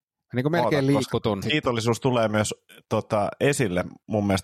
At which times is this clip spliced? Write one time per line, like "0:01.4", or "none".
0:01.4